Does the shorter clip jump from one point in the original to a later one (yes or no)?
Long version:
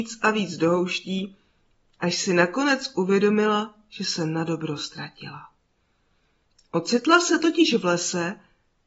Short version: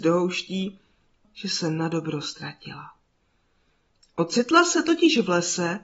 yes